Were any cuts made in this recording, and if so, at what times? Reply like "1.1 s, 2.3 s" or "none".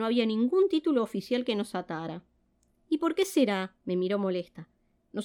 2.7 s, 3.8 s